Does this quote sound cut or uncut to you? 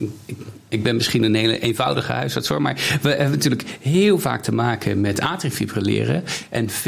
uncut